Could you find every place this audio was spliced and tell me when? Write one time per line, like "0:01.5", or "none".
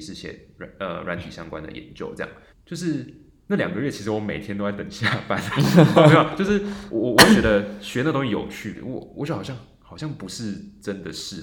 0:02.5
0:08.7